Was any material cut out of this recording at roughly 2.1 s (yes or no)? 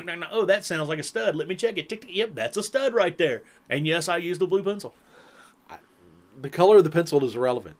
no